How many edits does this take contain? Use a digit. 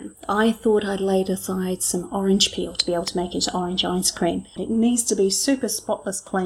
1